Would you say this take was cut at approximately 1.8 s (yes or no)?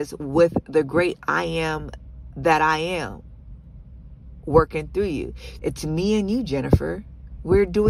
no